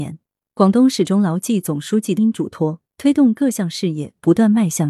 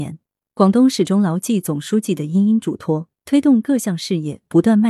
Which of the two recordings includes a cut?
first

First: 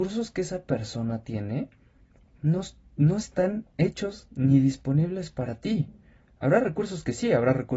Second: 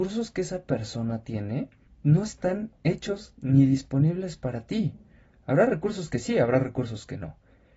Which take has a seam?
second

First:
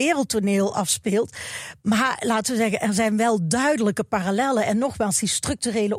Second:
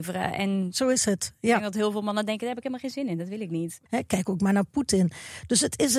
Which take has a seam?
second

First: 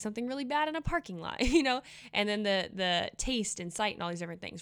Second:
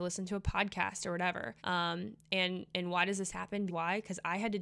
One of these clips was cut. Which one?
second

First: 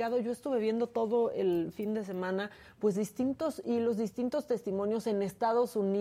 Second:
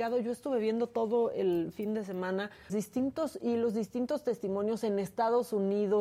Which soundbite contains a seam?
second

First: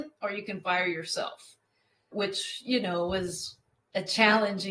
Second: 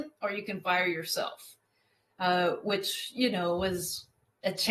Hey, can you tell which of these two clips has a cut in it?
first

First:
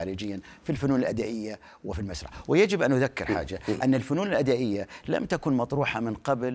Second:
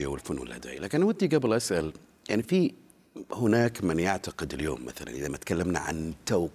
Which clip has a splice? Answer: second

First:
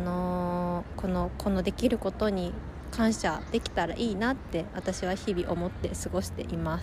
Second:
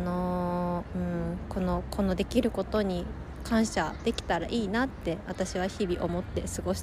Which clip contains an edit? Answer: first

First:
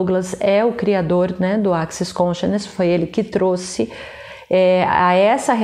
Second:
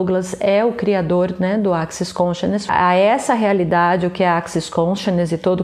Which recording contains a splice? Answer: second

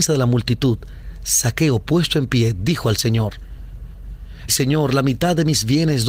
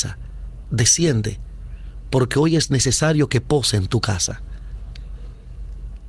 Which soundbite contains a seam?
first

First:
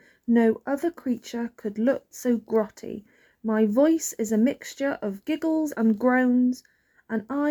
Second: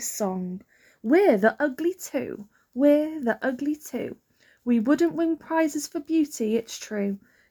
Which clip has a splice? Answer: first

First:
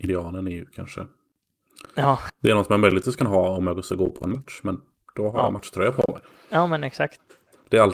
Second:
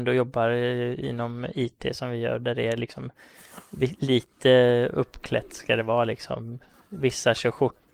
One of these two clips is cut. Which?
first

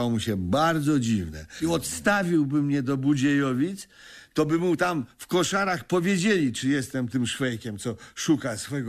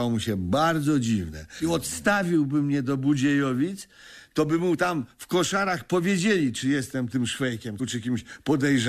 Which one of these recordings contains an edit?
second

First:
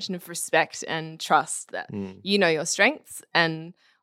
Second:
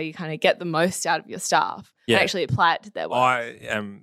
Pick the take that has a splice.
second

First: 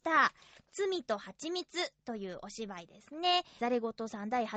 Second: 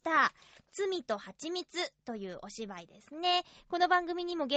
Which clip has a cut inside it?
first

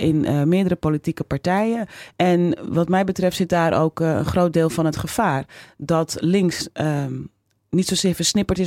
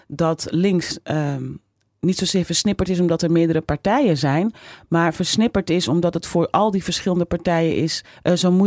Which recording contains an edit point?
first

